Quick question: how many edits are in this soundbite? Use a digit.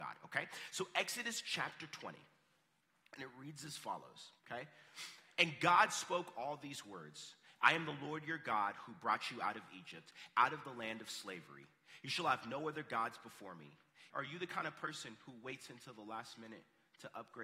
2